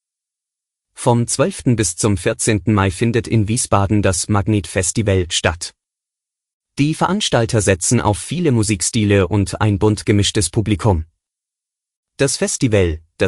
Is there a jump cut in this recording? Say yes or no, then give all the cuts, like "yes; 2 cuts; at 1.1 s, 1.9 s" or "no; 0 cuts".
no; 0 cuts